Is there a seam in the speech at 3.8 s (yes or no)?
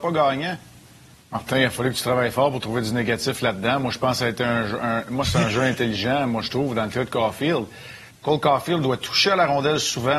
no